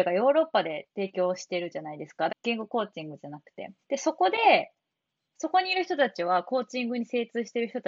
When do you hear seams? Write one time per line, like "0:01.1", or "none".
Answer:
0:02.3
0:03.8